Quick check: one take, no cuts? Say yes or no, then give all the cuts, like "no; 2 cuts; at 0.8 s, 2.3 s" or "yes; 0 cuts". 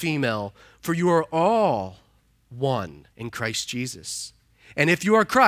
no; 1 cut; at 3.1 s